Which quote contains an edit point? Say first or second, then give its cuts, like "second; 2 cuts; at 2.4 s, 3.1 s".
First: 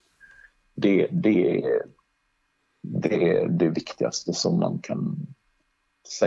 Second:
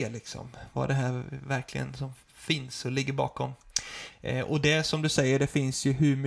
second; 1 cut; at 4.1 s